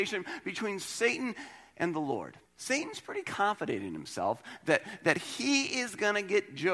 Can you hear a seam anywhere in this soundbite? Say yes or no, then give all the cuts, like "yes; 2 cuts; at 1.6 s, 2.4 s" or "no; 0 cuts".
yes; 1 cut; at 2.5 s